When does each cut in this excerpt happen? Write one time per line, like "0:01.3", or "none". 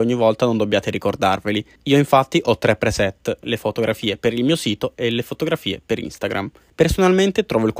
0:03.4
0:06.7